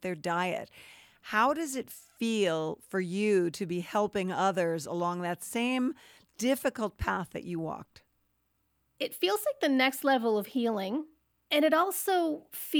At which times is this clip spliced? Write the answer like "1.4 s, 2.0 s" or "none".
none